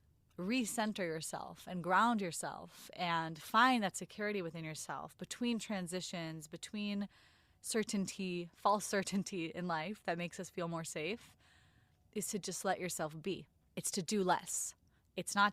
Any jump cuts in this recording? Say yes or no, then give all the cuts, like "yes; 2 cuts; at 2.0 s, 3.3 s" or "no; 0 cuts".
no; 0 cuts